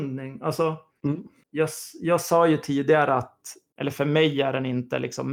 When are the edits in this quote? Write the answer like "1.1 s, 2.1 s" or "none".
3.7 s